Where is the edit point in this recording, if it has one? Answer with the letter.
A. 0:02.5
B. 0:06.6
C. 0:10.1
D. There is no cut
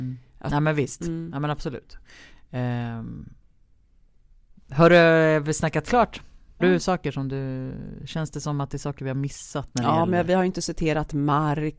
B